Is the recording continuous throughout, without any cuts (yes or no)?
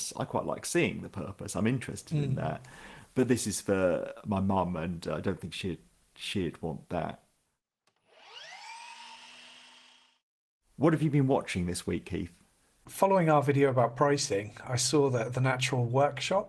yes